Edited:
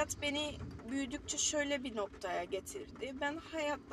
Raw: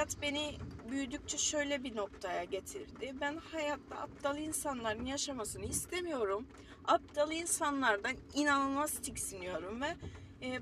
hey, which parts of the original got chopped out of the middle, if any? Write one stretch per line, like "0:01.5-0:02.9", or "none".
none